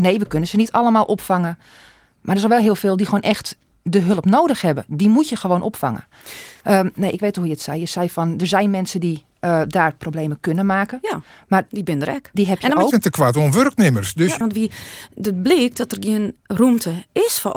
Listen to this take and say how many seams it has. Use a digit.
2